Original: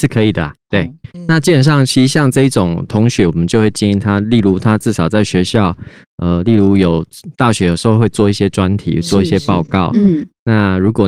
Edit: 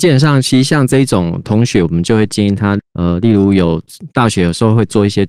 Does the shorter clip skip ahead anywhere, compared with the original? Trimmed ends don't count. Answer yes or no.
yes